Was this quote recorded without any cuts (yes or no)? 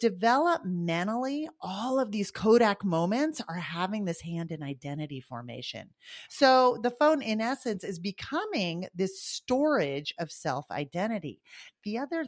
no